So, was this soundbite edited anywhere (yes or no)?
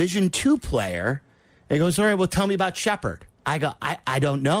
yes